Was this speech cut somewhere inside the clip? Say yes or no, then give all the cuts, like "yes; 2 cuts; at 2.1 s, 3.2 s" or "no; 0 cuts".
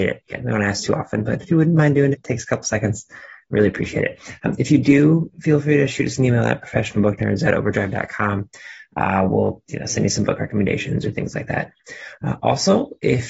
yes; 1 cut; at 2.1 s